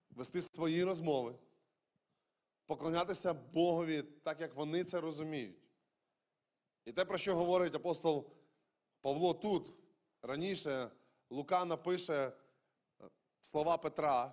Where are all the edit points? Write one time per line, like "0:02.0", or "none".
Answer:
none